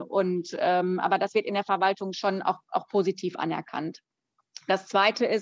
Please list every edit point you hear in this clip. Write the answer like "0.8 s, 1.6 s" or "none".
none